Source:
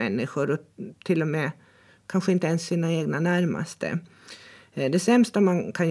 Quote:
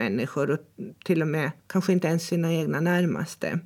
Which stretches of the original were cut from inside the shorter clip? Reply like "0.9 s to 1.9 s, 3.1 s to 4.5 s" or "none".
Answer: 1.6 s to 2.0 s

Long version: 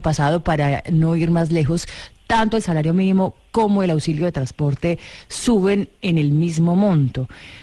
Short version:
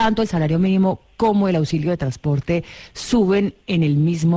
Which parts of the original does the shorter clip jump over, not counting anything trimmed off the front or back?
none

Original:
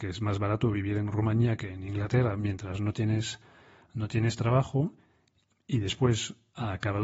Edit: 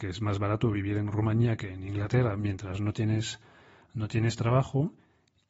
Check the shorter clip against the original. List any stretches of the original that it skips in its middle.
none

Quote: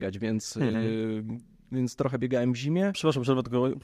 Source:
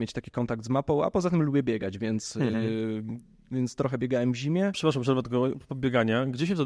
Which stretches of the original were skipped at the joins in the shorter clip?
none

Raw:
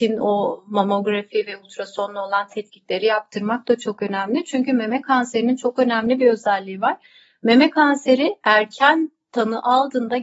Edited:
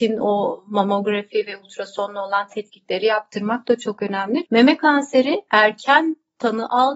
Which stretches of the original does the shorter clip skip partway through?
4.4 s to 7.4 s

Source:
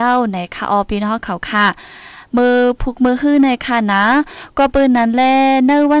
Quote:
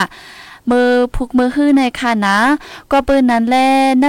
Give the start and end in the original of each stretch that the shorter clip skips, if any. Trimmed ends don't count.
none

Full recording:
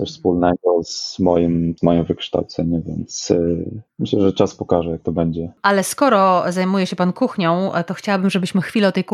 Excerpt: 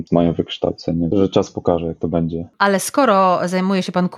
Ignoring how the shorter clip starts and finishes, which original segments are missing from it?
2.8 s to 4.2 s

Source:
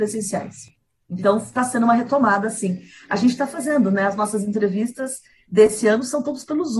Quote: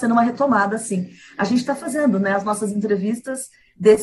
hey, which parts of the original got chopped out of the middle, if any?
none

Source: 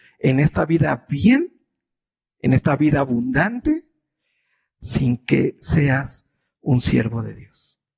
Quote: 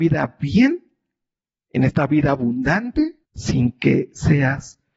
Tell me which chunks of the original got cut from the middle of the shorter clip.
3.9 s to 4.7 s

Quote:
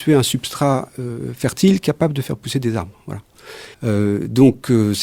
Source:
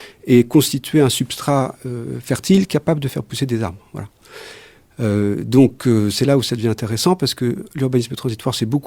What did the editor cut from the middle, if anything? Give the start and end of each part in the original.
4.6 s to 4.9 s

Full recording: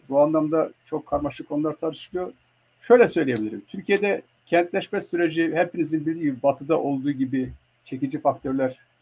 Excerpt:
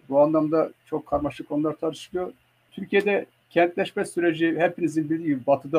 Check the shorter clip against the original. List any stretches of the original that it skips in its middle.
2.7 s to 3.6 s

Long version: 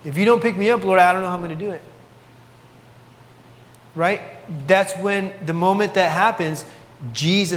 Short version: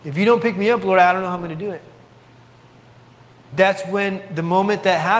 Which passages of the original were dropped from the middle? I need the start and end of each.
3.5 s to 4.6 s

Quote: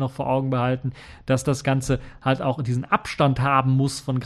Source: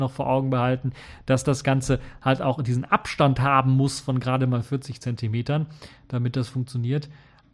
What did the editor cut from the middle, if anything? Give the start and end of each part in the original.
none

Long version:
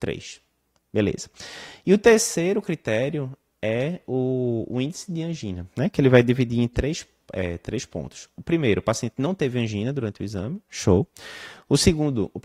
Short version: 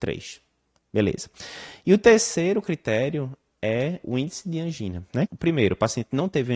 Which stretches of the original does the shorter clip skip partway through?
4.0 s to 4.7 s, 5.9 s to 8.3 s

